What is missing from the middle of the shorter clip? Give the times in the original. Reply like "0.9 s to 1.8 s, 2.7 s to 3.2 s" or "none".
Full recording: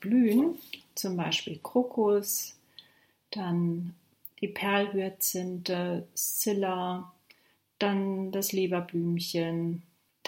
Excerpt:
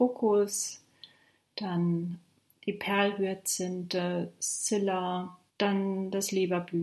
7.2 s to 7.7 s